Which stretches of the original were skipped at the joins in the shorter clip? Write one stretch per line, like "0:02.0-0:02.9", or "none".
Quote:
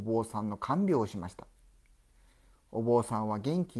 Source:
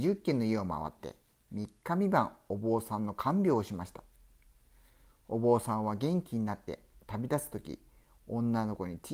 none